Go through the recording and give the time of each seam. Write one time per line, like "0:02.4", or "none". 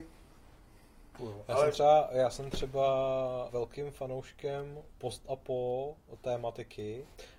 0:01.2
0:03.5